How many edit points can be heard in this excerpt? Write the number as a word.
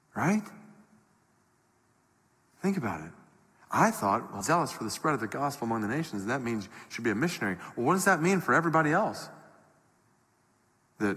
one